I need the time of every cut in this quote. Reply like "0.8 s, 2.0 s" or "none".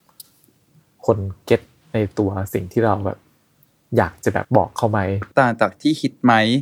4.4 s

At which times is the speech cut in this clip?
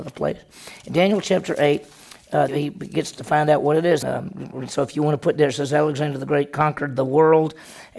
2.5 s, 4.0 s

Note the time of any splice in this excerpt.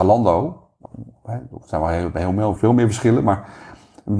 2.6 s

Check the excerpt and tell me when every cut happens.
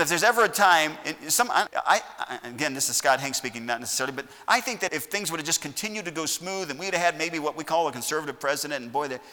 1.7 s, 4.9 s

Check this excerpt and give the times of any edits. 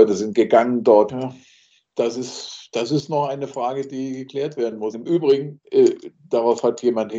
1.1 s, 4.9 s

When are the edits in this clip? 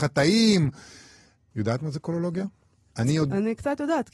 1.5 s

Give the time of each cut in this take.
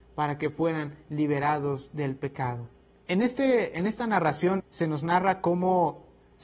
3.1 s, 4.6 s

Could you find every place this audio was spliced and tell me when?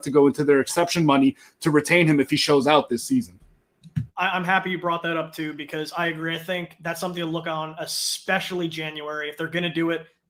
none

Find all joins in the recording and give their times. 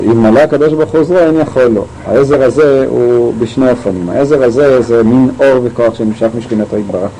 none

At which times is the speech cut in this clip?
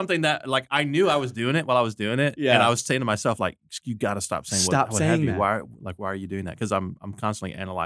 none

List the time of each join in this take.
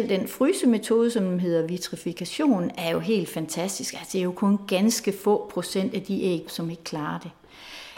6.5 s

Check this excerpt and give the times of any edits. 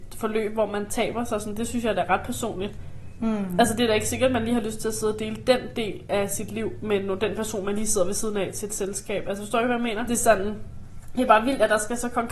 10.1 s

